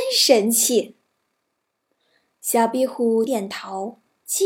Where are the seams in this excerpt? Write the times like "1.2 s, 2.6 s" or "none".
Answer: 1.6 s, 3.3 s